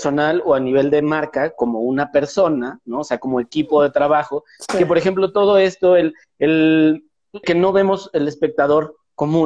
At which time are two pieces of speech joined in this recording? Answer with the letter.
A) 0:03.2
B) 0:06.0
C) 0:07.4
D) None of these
C